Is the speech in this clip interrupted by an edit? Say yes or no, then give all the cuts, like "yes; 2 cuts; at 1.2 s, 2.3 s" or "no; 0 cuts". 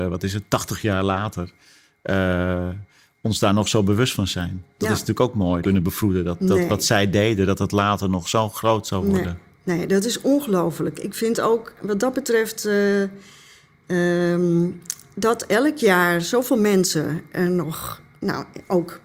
yes; 1 cut; at 5.6 s